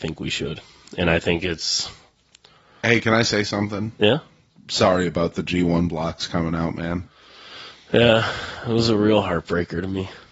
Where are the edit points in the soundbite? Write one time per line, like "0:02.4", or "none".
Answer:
none